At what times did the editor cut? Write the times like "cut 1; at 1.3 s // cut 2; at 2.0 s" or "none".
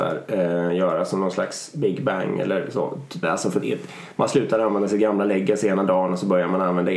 cut 1; at 3.2 s